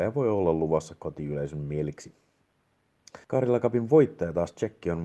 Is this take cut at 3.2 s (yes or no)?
yes